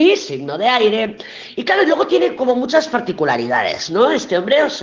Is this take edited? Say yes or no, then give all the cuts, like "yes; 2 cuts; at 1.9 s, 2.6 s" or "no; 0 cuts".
no; 0 cuts